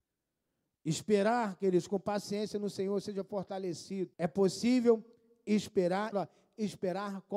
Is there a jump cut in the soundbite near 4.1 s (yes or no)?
yes